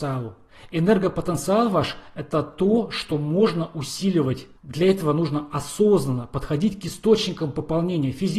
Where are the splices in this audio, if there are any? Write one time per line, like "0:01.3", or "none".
0:04.6